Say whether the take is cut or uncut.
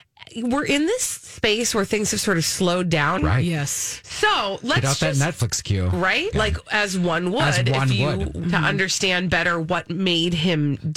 cut